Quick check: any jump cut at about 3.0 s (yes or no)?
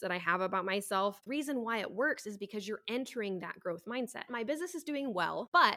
no